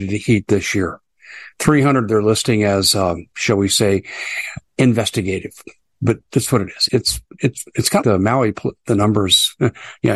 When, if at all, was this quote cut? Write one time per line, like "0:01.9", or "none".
0:06.9
0:08.0